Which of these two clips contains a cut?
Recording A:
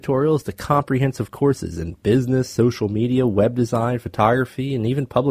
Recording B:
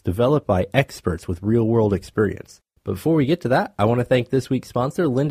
B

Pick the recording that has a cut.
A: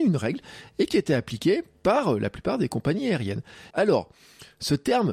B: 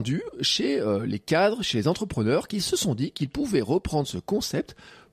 A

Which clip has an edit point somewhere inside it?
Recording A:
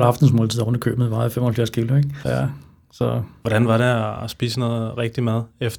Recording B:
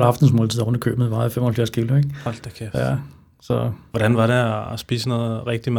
A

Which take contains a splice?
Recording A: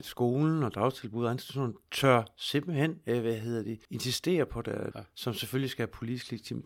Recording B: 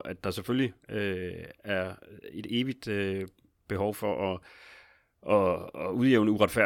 A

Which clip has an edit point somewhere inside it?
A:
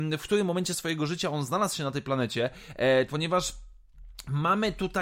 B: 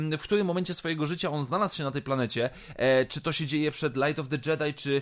A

